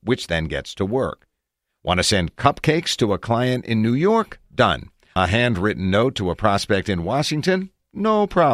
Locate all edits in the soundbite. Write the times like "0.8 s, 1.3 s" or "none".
none